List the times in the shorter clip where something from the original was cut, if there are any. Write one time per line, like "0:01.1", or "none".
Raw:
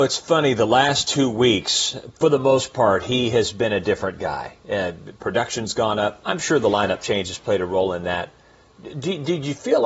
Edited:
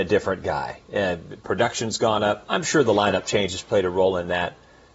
none